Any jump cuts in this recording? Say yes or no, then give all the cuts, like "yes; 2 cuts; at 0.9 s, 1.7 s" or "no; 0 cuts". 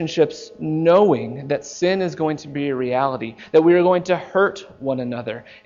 no; 0 cuts